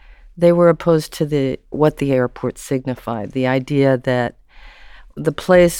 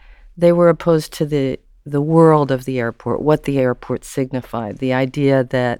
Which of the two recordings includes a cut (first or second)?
first